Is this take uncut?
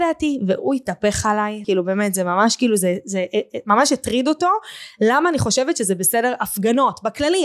no; 1 cut; at 1.6 s

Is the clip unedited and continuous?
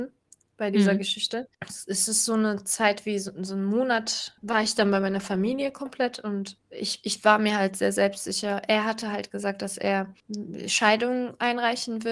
yes; 0 cuts

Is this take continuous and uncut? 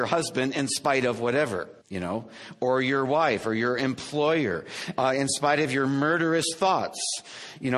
no; 1 cut; at 1.8 s

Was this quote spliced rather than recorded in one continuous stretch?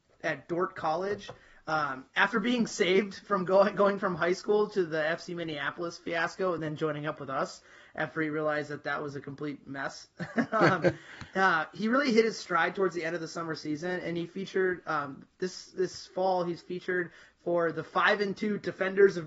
no; 0 cuts

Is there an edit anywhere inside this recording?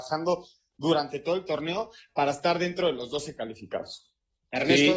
no; 0 cuts

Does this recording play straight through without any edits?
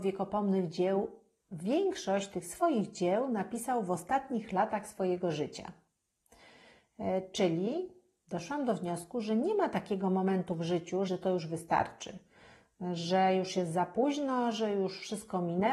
no; 1 cut; at 11.1 s

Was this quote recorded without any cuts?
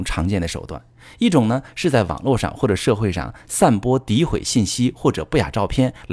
yes; 0 cuts

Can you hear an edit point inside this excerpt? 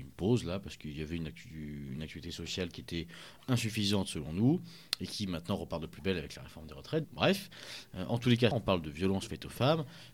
yes; 2 cuts; at 7.0 s, 8.5 s

